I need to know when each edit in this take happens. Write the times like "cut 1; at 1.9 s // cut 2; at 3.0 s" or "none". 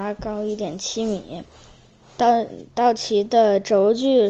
none